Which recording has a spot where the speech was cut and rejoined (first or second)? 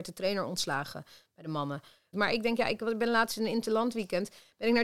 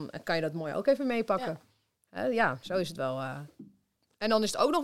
first